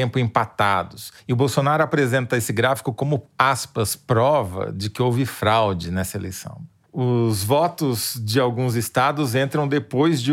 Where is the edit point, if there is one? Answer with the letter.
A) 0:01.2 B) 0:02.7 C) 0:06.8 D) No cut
C